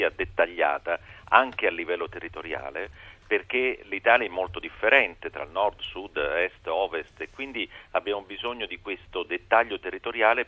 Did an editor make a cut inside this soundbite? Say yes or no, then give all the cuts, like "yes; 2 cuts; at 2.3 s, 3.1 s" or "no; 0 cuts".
no; 0 cuts